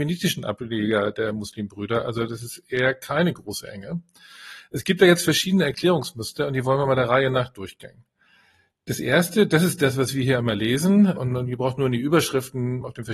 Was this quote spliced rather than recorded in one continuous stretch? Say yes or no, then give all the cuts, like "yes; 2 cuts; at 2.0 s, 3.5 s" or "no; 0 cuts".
no; 0 cuts